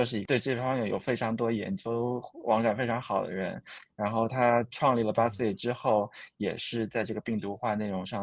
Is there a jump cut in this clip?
no; 0 cuts

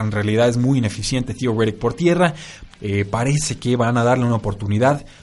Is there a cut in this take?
yes; 1 cut; at 2.7 s

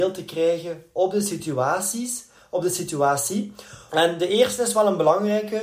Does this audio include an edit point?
yes; 1 cut; at 3.9 s

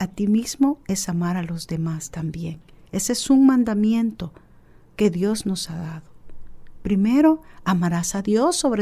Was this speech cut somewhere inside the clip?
no; 0 cuts

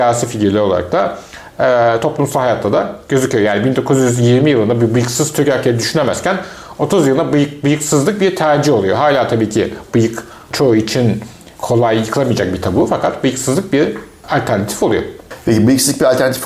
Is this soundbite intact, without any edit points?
no; 1 cut; at 11.5 s

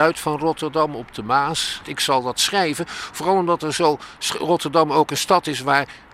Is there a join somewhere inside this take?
yes; 1 cut; at 1.8 s

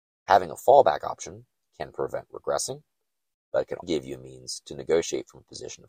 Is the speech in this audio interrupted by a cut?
yes; 1 cut; at 3.8 s

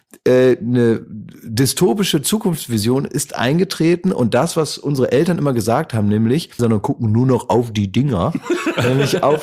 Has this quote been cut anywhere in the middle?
yes; 1 cut; at 6.6 s

